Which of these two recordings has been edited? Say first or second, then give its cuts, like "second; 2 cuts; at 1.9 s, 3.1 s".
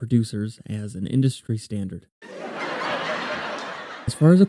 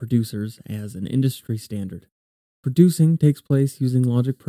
first; 1 cut; at 2.2 s